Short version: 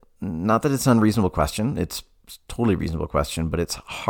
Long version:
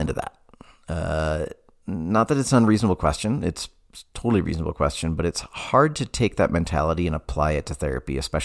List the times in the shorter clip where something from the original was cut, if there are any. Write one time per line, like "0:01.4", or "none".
none